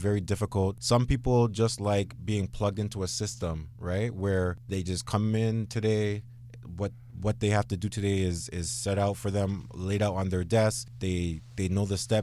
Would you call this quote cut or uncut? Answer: uncut